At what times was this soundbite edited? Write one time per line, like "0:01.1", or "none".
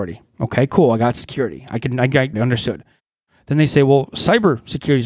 0:02.3